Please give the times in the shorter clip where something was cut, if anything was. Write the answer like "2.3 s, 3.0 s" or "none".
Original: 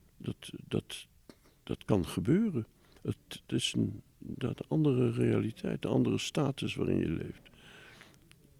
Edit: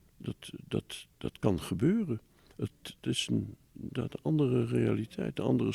1.1 s